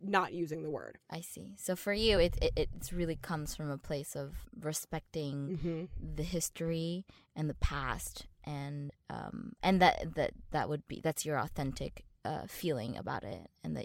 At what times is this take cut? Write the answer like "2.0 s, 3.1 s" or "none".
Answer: none